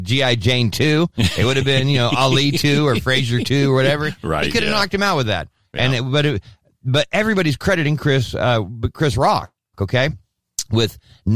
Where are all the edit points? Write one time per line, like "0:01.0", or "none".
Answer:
none